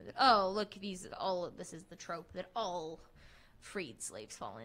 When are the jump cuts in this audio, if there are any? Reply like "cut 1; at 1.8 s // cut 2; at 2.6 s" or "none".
cut 1; at 1.1 s